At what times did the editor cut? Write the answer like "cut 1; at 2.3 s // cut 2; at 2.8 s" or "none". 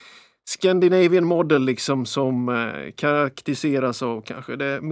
none